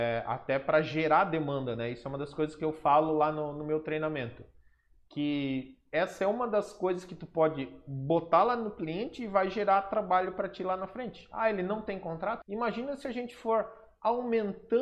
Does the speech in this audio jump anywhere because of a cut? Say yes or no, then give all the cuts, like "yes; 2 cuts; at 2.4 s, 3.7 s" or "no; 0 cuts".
yes; 1 cut; at 12.4 s